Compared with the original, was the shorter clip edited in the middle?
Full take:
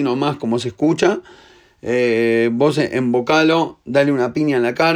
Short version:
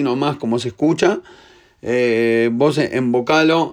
no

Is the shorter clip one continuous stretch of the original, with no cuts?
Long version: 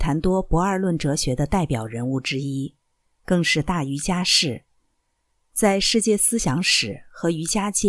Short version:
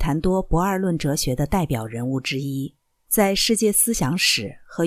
no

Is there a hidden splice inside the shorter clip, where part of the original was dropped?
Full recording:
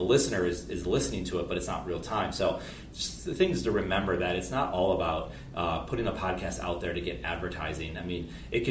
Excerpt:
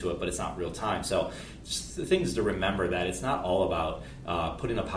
no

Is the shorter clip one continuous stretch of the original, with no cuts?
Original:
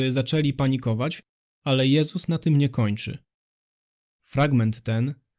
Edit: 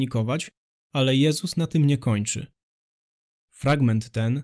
yes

